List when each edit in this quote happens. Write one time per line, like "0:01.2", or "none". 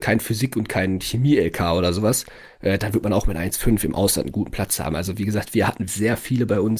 0:05.9